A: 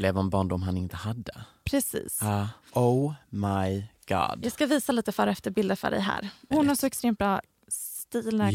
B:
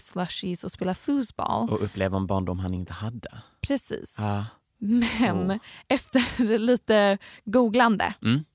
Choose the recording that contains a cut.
A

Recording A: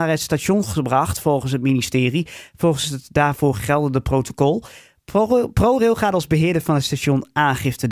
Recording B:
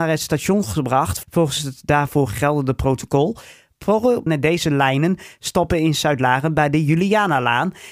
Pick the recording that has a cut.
B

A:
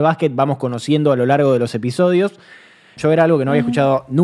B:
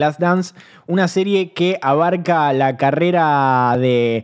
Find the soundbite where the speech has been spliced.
A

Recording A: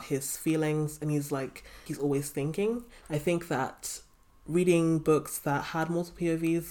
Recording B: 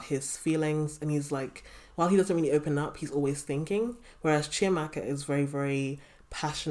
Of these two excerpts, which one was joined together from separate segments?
A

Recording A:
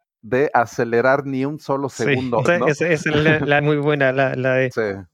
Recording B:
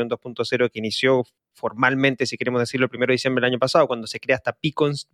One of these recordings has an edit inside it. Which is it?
A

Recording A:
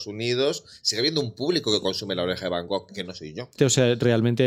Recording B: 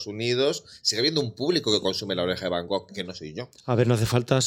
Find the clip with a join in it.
A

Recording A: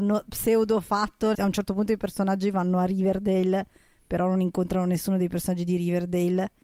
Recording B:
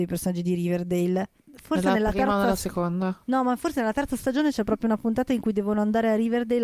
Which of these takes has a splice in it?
A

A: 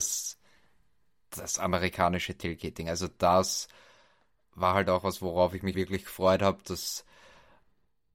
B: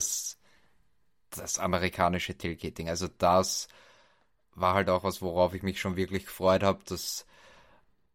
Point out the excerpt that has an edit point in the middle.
A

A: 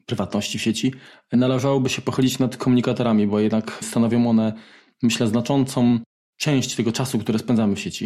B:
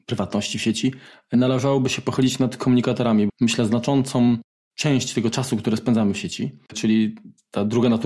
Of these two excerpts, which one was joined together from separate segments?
B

